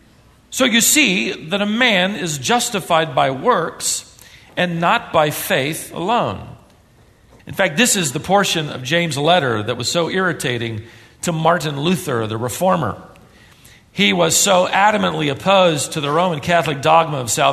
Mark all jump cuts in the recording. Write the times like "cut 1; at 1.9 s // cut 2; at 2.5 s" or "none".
cut 1; at 7.4 s